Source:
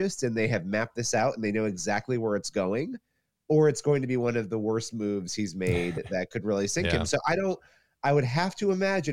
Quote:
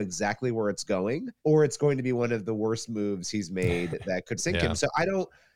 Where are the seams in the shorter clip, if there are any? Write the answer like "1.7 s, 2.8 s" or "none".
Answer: 1.4 s, 4.4 s